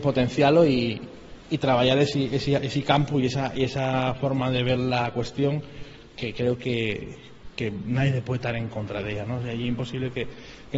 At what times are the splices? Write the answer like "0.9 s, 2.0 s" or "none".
none